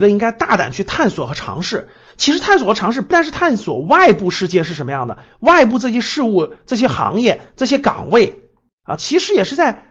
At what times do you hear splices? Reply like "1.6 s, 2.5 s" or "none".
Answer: 3.1 s, 9.0 s